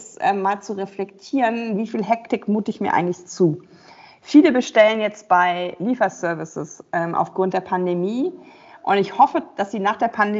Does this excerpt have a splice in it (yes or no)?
no